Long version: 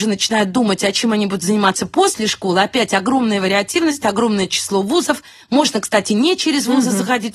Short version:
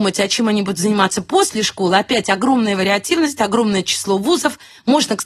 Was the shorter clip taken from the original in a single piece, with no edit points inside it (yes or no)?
yes